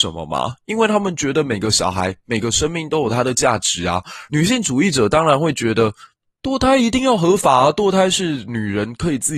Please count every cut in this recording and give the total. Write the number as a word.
one